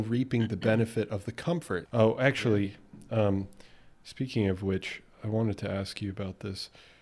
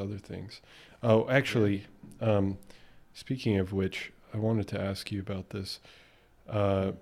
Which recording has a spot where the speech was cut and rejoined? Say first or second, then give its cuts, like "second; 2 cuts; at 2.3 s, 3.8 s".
first; 1 cut; at 1.9 s